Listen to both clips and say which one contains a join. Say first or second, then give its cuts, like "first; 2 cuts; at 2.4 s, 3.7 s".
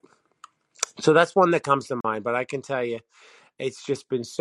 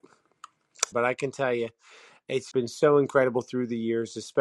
second; 2 cuts; at 0.9 s, 2.5 s